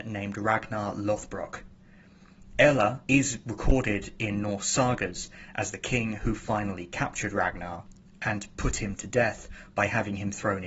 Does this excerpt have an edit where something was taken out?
yes; 1 cut; at 3.1 s

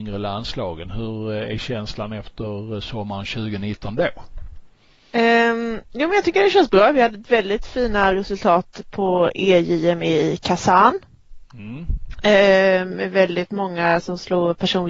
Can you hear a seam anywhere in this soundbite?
no; 0 cuts

